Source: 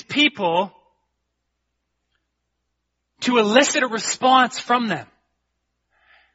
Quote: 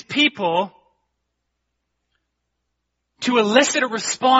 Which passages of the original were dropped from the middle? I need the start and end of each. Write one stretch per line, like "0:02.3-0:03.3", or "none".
none

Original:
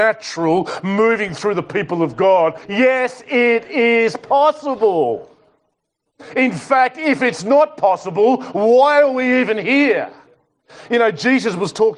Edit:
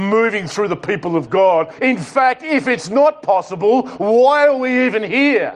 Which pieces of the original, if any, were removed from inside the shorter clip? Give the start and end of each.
0:02.6-0:06.3

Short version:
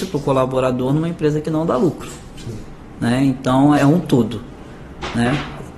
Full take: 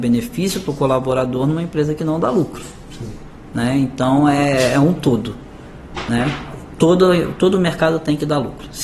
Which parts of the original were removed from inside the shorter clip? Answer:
0:04.3-0:04.7

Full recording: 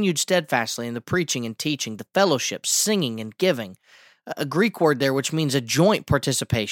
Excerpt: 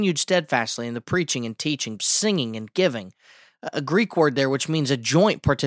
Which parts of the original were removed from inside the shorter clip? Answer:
0:02.0-0:02.6

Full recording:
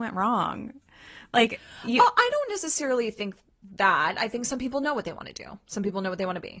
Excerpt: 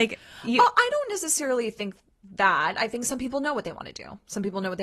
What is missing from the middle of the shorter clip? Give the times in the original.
none

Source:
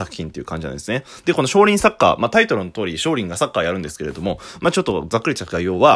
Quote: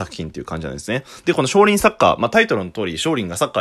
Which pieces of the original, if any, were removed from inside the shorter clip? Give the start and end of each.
none

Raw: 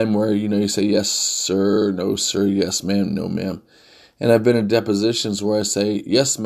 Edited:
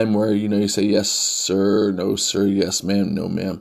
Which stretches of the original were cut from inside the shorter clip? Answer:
none

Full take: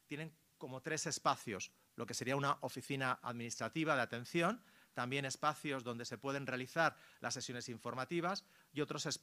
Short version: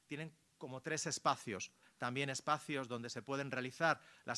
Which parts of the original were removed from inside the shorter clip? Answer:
0:01.8-0:04.8

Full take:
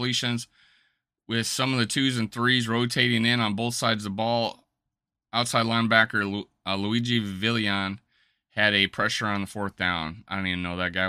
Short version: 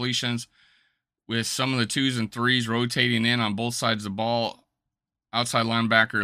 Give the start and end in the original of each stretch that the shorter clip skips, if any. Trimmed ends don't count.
none

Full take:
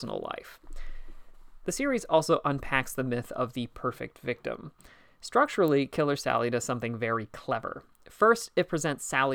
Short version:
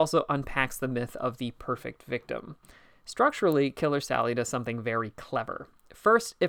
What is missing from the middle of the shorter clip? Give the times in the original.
none

